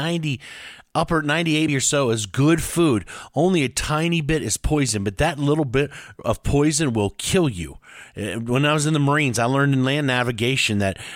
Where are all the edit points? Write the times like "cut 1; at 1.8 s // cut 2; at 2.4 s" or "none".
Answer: cut 1; at 1.7 s